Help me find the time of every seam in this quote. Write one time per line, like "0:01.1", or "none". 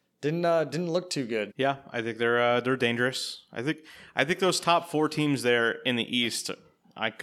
0:01.5

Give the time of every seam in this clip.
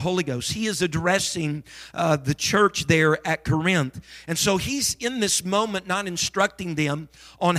none

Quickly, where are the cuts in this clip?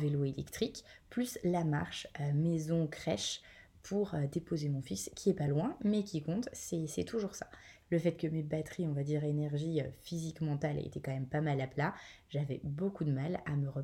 0:07.8

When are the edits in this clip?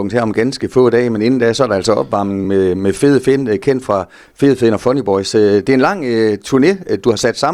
none

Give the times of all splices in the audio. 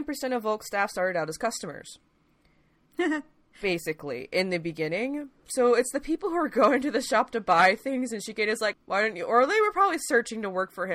0:08.7

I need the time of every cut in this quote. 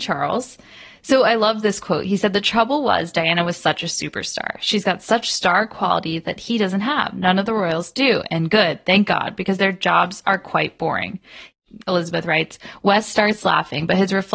none

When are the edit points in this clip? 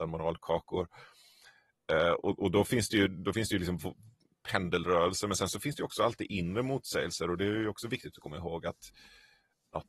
none

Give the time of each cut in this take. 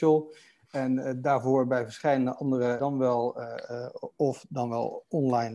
0:02.8

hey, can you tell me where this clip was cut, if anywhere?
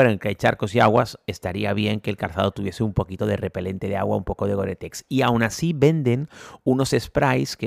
none

